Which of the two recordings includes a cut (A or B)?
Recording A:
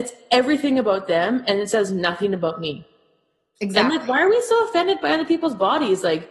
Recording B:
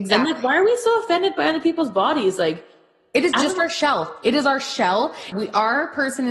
B